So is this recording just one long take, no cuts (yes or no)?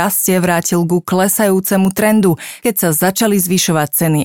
no